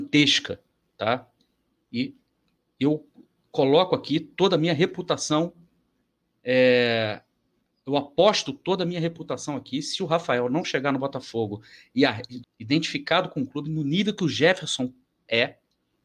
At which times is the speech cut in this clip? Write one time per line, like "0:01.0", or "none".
0:12.4

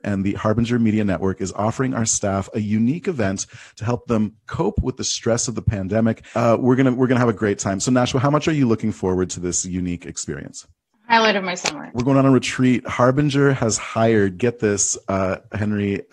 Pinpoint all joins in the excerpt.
0:11.9

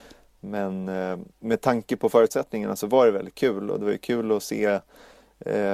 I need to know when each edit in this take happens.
none

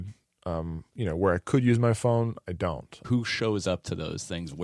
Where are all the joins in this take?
0:03.0

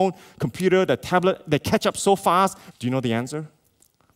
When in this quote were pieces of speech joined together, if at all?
0:02.7

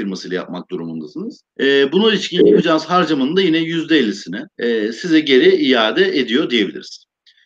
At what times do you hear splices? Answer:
0:01.5
0:04.5

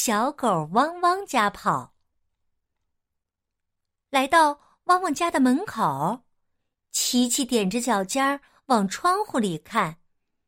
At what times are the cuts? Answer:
none

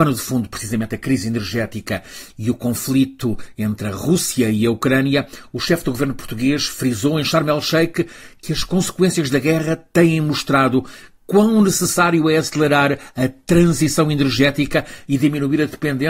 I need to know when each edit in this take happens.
none

